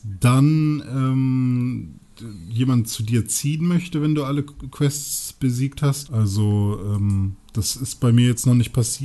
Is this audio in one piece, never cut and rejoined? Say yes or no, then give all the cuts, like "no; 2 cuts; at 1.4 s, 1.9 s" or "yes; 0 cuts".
no; 1 cut; at 6.1 s